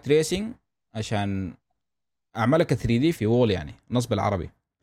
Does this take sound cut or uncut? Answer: cut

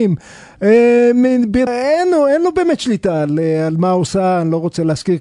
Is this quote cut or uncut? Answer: cut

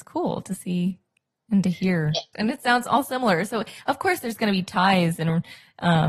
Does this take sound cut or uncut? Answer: cut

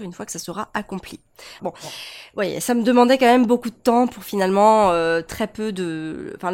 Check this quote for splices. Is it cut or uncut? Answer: cut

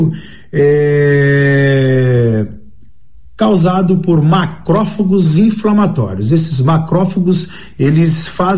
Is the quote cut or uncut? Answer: uncut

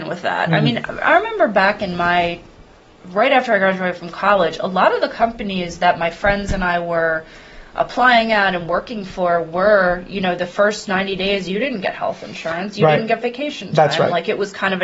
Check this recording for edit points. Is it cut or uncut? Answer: uncut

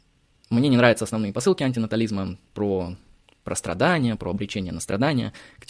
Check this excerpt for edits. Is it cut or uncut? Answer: uncut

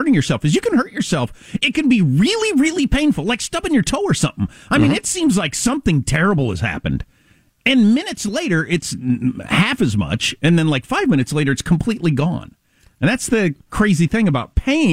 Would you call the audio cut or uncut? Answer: uncut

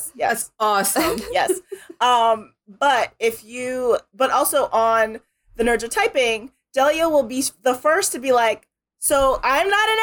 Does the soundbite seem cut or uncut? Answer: uncut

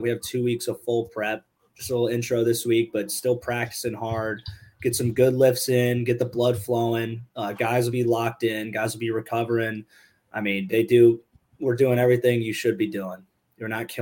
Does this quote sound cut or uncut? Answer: uncut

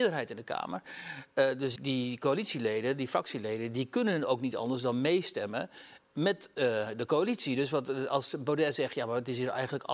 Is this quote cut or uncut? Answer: cut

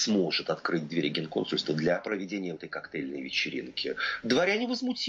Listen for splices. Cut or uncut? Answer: cut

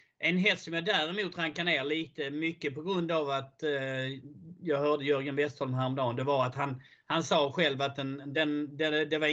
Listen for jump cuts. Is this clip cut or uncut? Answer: uncut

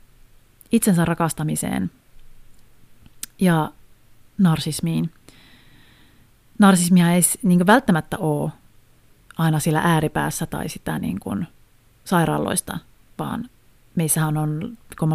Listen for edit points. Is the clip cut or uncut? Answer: uncut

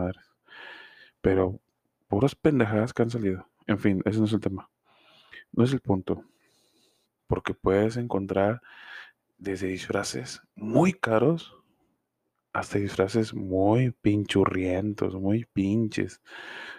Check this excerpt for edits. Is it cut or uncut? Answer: cut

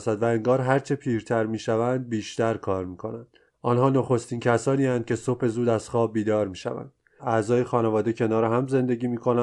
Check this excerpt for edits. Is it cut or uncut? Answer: cut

